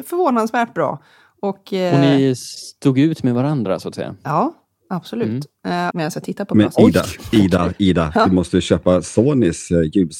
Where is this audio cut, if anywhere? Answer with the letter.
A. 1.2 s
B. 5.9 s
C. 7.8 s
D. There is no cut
B